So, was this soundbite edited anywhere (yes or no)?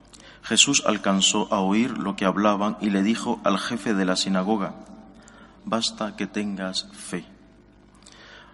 yes